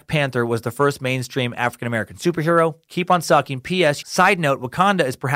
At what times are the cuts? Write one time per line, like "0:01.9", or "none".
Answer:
0:02.9
0:04.0